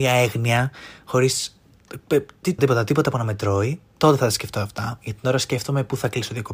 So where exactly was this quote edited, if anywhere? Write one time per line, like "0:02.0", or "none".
0:02.6